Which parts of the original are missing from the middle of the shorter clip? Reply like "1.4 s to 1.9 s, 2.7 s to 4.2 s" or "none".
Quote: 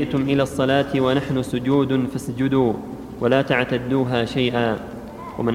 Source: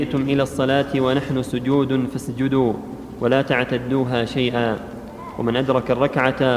none